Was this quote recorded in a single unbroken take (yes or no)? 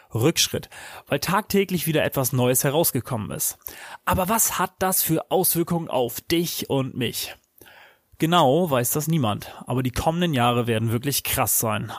yes